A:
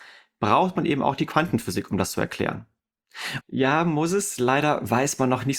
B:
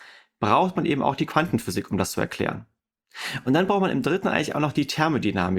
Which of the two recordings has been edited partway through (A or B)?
A